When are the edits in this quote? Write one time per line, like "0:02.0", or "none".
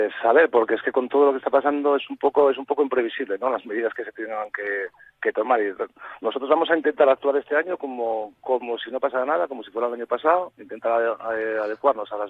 none